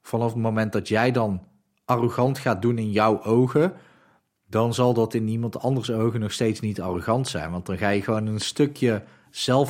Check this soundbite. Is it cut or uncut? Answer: uncut